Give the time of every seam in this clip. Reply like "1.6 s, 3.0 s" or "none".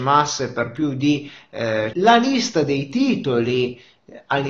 1.9 s